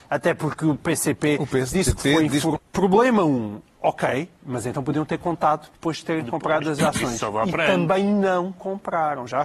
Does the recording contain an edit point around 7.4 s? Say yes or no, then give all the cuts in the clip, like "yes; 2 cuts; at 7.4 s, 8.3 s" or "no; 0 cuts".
no; 1 cut; at 2.6 s